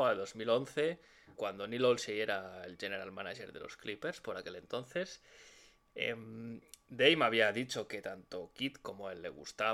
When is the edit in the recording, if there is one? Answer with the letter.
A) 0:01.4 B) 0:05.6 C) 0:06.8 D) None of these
A